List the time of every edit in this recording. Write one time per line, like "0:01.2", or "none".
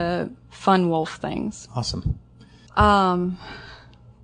0:02.7